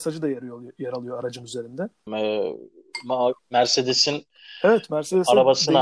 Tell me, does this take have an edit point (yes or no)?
yes